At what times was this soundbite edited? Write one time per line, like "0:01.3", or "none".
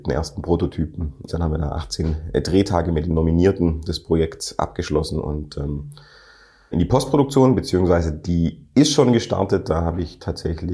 0:01.3
0:06.7